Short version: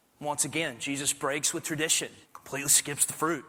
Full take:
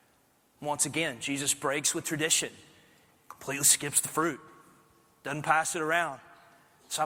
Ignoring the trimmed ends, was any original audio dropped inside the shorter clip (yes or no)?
yes